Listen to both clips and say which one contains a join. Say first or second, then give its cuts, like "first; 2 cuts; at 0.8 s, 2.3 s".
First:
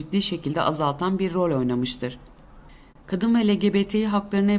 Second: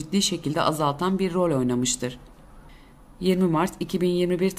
first; 1 cut; at 2.9 s